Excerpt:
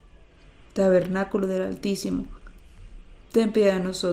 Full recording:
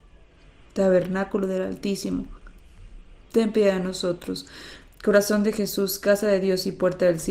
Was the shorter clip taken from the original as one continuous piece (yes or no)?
yes